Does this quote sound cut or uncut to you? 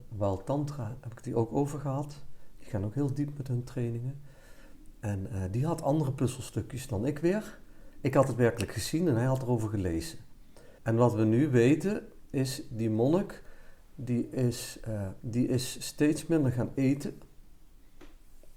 cut